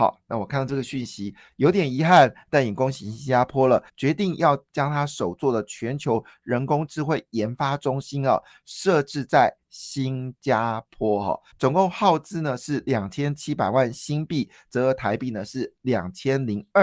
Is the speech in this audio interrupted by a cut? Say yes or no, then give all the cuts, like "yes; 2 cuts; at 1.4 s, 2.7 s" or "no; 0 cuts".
yes; 2 cuts; at 3.9 s, 11.5 s